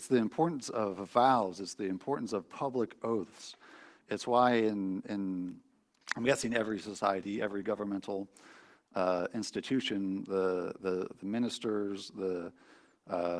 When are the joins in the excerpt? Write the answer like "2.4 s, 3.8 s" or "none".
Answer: none

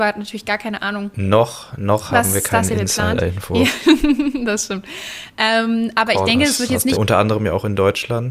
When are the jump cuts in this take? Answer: 6.9 s

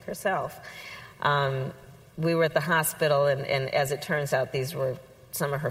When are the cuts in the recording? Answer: none

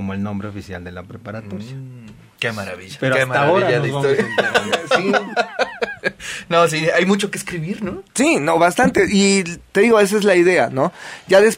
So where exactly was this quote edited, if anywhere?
none

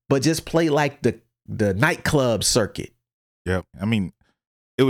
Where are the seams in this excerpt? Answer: 3.7 s

